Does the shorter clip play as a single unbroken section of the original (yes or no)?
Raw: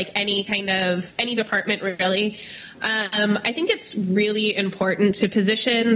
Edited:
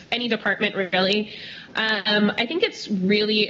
yes